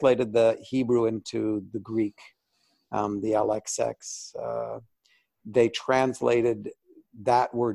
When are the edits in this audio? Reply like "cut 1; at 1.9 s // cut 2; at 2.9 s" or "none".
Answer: none

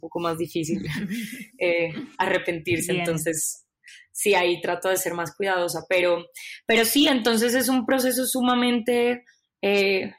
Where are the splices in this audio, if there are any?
none

